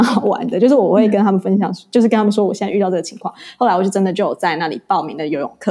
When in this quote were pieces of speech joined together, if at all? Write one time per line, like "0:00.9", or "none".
none